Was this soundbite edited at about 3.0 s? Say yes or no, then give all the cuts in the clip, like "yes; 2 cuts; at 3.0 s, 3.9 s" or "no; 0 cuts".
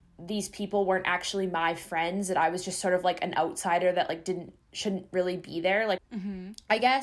no; 1 cut; at 6.0 s